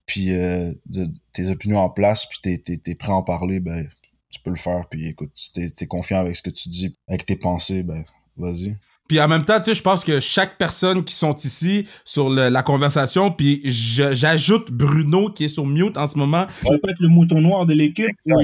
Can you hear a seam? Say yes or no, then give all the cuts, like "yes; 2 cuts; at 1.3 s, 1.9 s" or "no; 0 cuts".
yes; 2 cuts; at 6.9 s, 16.6 s